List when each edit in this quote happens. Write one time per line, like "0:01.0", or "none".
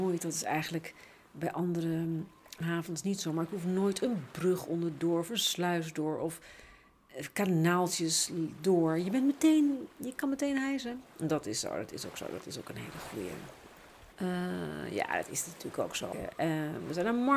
0:14.1
0:16.1